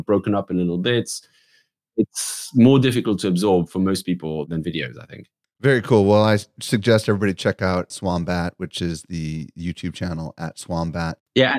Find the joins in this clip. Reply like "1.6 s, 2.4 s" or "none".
none